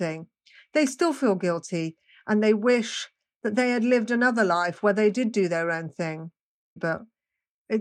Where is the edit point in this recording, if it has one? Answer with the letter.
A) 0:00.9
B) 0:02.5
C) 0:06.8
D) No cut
C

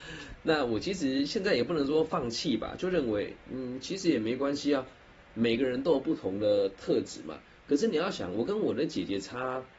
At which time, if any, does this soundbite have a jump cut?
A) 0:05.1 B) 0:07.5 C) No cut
C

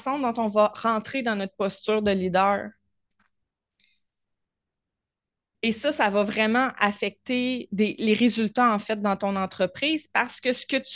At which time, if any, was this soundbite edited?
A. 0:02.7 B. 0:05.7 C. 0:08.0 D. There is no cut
D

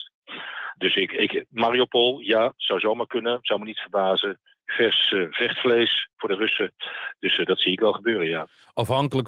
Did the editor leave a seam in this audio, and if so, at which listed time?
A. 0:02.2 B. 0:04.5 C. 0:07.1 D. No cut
D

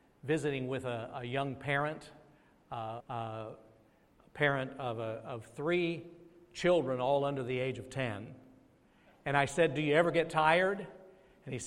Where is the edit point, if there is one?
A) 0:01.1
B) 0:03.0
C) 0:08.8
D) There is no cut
B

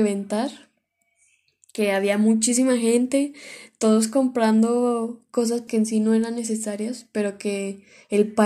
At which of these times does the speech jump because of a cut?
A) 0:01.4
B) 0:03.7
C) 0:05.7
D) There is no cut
C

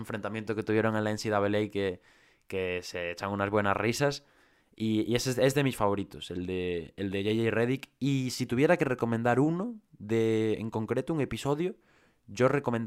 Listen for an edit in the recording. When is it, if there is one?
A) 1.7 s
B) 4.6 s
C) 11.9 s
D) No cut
D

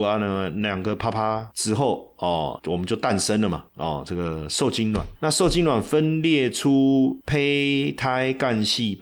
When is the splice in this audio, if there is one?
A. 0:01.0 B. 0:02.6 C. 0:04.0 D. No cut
B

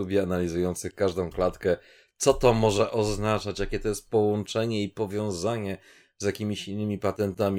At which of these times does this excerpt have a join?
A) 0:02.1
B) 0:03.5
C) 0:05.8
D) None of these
D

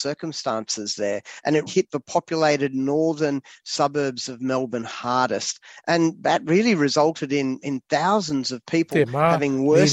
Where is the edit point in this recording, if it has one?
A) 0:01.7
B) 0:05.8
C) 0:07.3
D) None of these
A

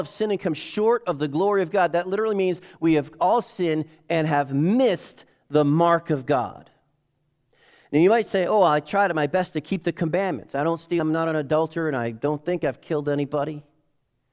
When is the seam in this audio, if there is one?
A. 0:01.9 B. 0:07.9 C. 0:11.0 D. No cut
C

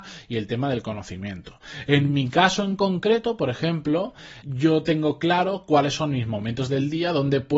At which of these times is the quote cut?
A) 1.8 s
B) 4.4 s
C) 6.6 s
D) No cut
B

